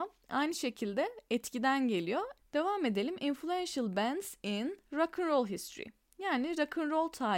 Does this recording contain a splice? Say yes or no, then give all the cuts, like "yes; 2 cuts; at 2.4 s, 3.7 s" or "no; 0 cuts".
yes; 1 cut; at 2.4 s